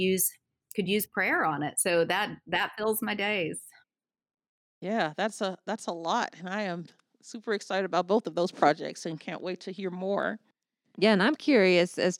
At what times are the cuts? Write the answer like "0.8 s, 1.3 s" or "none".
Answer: none

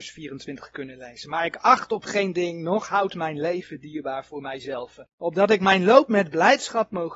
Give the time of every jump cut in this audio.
5.1 s

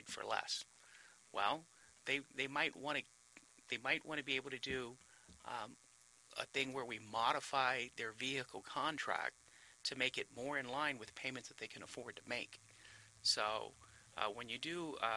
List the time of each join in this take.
none

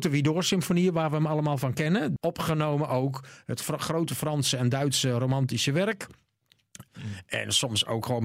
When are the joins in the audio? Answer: 2.2 s, 6.9 s

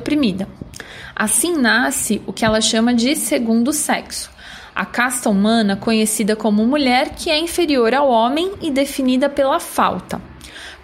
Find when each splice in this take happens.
none

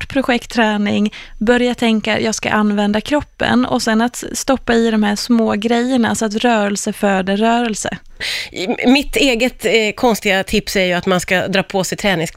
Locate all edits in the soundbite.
5.2 s

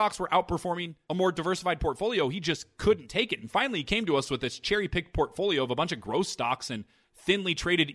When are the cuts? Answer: none

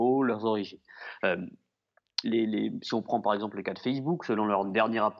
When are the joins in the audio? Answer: 2.2 s

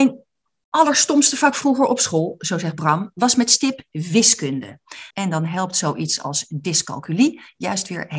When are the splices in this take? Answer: 5.1 s

